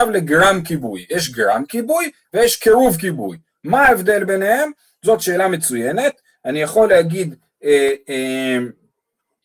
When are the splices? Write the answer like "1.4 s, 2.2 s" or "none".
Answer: none